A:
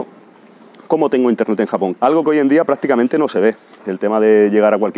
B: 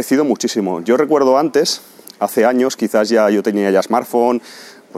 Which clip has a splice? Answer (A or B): A